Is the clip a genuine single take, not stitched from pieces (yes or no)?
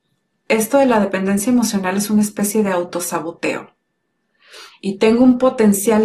no